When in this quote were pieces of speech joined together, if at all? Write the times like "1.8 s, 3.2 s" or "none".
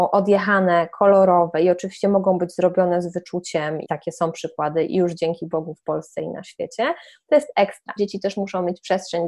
3.8 s, 8.0 s